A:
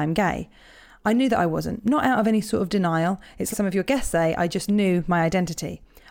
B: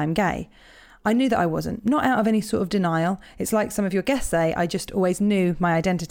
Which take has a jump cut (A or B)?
A